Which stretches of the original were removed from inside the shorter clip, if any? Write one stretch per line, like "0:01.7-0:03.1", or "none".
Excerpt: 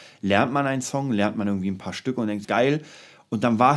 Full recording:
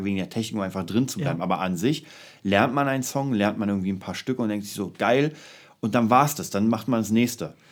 0:04.7-0:05.0